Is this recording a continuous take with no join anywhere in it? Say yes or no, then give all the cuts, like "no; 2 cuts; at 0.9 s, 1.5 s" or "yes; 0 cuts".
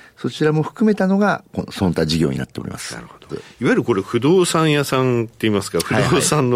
no; 1 cut; at 3.3 s